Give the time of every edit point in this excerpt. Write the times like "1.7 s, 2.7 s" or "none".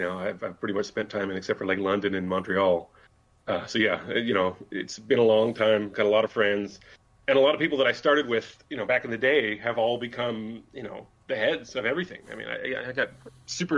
none